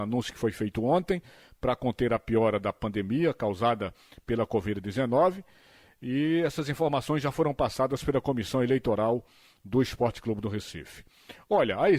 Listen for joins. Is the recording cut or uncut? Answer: uncut